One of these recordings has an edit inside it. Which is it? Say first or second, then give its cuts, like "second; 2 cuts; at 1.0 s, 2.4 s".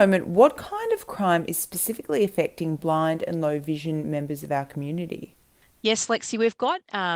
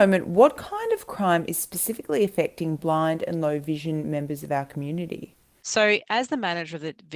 second; 1 cut; at 5.6 s